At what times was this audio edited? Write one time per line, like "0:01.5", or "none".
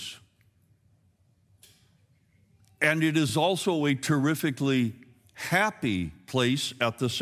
none